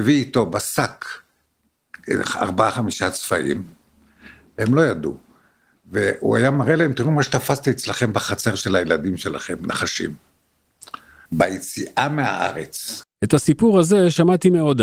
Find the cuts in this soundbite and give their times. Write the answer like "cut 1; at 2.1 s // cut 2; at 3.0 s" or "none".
cut 1; at 11.3 s // cut 2; at 13.0 s